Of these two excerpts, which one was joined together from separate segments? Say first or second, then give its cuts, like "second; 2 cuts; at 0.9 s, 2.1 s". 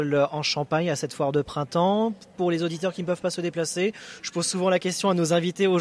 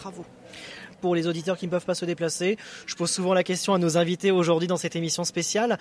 second; 1 cut; at 0.9 s